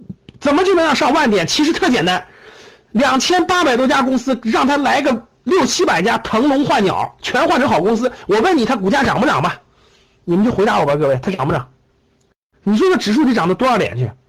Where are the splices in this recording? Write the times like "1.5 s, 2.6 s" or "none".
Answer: none

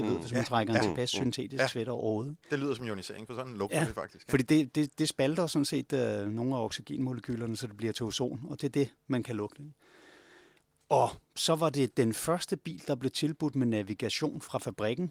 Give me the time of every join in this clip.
none

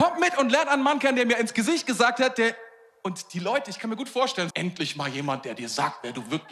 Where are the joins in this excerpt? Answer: 4.5 s

